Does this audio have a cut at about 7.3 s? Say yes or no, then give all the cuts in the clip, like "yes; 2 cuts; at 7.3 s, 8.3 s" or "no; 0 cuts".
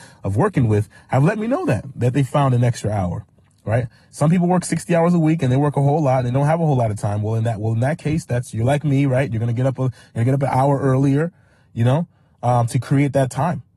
no; 0 cuts